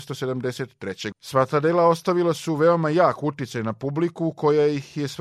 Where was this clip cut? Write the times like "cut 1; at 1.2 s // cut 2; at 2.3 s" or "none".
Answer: cut 1; at 1.1 s